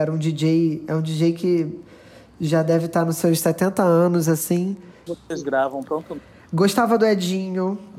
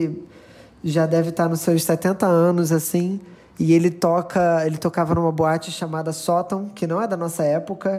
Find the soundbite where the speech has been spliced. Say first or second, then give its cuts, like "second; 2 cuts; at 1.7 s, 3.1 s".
first; 1 cut; at 5.1 s